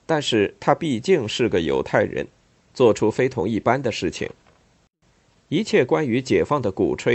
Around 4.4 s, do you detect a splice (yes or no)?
no